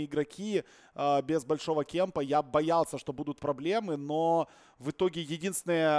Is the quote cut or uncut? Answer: uncut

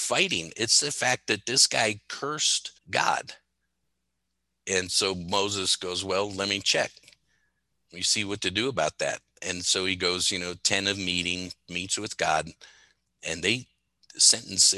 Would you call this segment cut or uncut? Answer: cut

